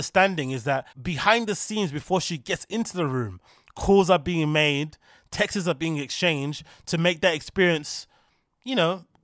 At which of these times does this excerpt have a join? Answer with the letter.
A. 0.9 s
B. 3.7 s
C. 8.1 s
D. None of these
A